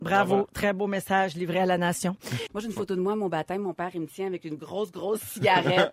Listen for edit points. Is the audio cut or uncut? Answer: cut